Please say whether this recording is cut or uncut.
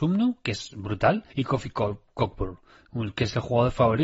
cut